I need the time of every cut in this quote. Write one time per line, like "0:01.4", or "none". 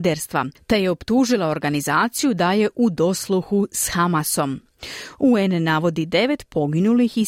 0:05.2